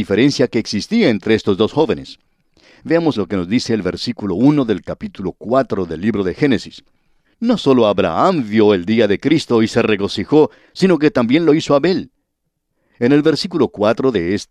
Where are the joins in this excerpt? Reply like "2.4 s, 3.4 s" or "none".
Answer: 3.1 s, 7.2 s